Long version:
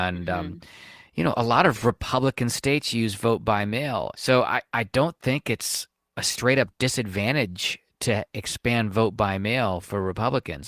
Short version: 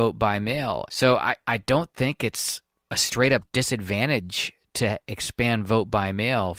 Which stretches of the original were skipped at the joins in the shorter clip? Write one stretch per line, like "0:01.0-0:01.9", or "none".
none

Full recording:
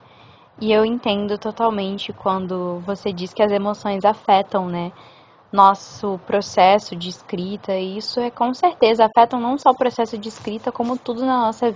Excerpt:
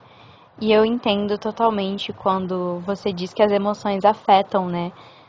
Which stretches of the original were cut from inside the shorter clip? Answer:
none

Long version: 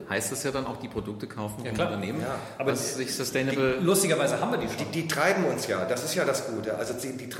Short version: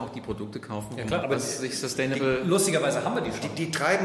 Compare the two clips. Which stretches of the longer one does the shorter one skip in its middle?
0:01.9-0:02.6

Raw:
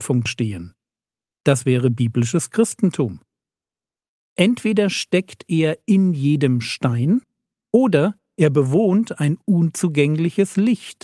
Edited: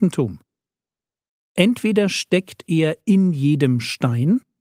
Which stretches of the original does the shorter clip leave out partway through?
none

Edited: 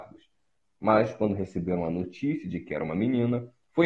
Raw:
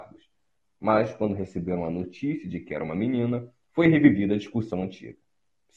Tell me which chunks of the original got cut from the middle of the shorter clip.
none

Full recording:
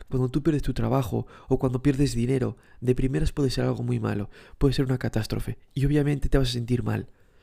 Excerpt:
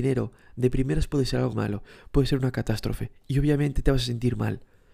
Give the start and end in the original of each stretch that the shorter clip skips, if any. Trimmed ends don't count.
0:03.8-0:04.0

